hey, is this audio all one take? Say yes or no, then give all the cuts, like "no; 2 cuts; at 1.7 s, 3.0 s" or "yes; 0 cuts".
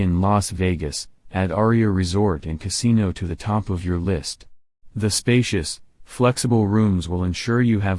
no; 1 cut; at 4.9 s